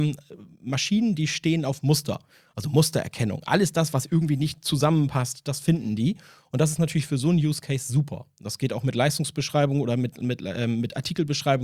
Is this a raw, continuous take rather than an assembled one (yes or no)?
yes